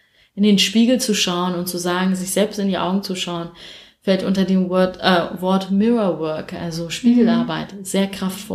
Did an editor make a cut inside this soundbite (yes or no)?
no